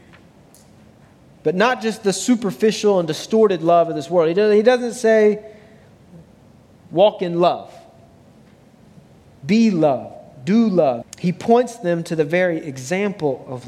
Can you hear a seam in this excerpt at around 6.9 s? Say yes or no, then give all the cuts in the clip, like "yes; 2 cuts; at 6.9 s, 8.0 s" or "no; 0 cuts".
no; 1 cut; at 11.0 s